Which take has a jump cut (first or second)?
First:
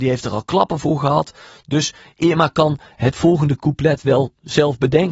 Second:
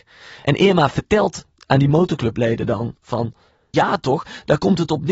second